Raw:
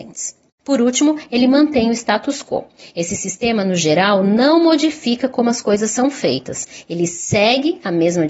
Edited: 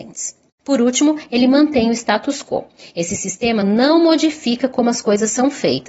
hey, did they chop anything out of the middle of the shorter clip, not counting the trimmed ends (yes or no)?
yes